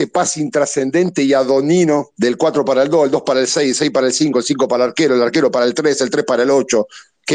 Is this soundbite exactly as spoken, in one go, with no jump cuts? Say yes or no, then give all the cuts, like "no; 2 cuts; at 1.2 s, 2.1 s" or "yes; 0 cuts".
yes; 0 cuts